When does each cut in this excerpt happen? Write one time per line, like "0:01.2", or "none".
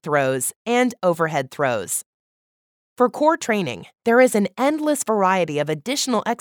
none